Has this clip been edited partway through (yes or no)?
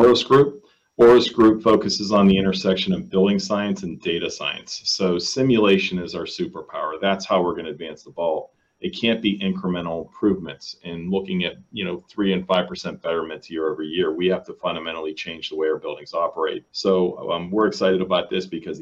yes